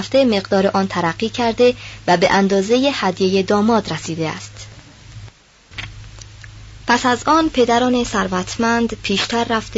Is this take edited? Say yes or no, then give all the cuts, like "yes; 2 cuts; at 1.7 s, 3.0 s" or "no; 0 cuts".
no; 0 cuts